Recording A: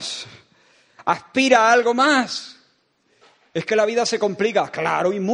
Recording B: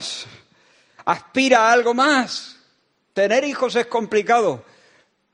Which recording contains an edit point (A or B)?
B